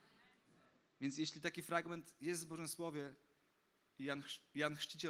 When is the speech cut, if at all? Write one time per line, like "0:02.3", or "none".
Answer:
none